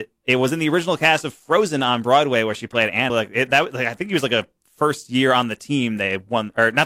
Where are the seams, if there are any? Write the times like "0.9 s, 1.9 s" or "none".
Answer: 3.1 s

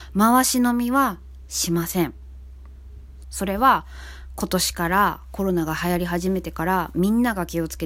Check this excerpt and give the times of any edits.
3.2 s

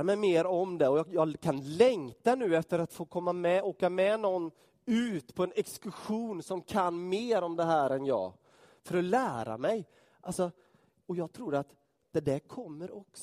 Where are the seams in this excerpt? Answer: none

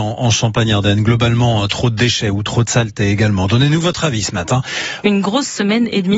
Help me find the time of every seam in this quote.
5.0 s

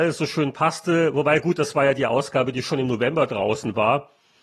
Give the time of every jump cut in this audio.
none

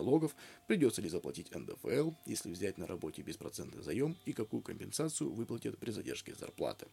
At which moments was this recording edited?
none

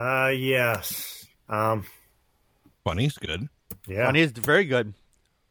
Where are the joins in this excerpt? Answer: 1.3 s

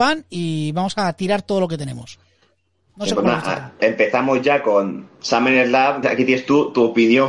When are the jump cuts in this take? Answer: 3.8 s, 6.0 s

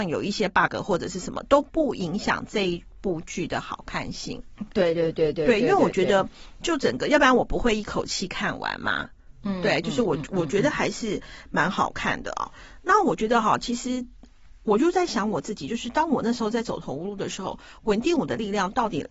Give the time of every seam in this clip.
none

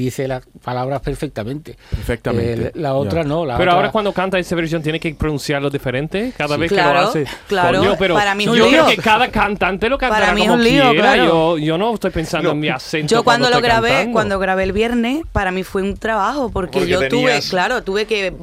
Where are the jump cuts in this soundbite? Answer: none

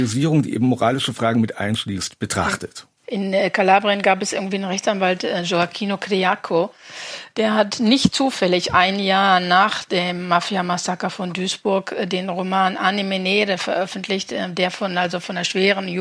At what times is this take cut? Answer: 3.0 s

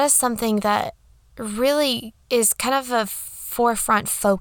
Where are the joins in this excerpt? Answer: 2.2 s

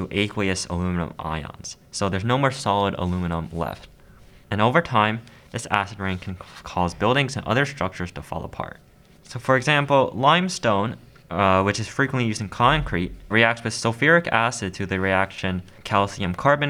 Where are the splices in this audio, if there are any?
9.2 s, 13.3 s

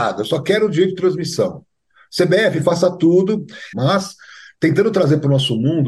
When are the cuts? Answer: 3.7 s

